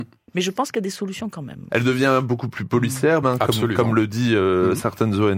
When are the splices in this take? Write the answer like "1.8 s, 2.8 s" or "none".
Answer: 1.7 s, 3.2 s